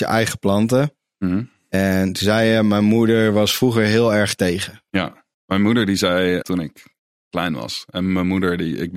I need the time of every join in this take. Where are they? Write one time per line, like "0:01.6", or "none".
0:05.3
0:06.4